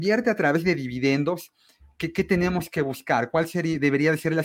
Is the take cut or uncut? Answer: uncut